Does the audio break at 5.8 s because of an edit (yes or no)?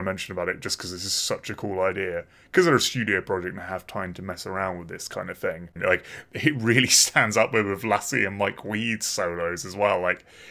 yes